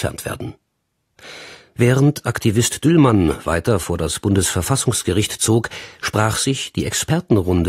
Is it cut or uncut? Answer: cut